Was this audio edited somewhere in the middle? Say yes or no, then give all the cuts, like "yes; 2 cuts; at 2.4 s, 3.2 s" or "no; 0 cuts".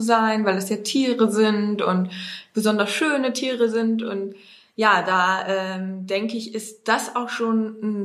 no; 0 cuts